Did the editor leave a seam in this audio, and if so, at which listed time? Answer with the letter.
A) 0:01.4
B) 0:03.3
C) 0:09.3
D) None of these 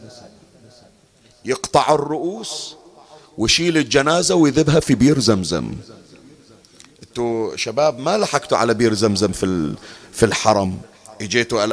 D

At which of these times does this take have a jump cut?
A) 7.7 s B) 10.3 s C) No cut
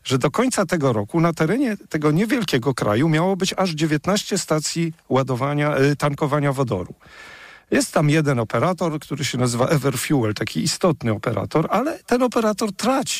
C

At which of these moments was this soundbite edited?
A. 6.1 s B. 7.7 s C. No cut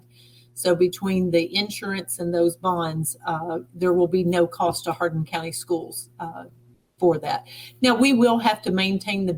C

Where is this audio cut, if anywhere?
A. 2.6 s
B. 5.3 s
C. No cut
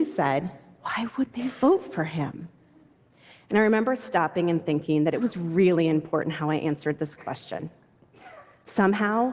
C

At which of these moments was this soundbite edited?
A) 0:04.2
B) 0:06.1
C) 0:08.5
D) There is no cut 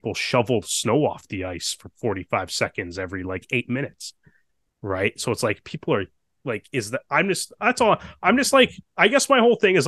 D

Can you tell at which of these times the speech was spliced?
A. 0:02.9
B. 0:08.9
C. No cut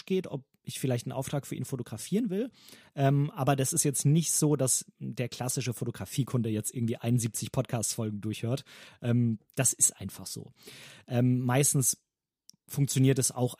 C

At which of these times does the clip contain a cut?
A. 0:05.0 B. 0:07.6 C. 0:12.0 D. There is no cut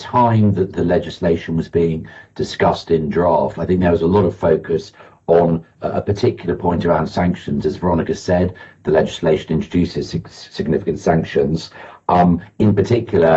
D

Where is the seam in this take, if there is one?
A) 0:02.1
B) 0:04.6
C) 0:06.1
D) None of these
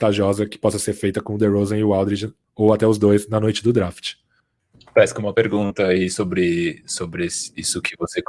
D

